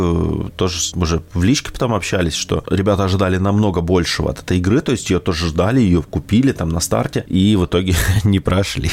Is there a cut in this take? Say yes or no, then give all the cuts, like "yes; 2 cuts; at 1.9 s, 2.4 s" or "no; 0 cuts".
no; 0 cuts